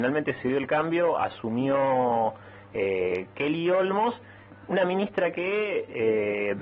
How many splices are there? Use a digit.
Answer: 0